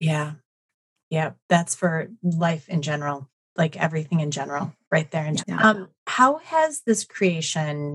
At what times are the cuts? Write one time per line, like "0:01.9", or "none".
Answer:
0:05.4